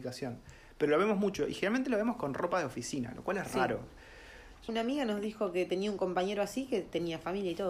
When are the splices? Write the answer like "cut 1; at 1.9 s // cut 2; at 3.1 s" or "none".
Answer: cut 1; at 4.7 s